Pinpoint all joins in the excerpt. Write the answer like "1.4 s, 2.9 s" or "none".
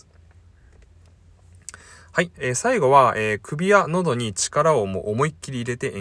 2.3 s